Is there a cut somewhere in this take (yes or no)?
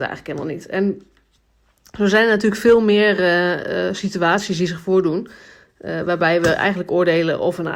no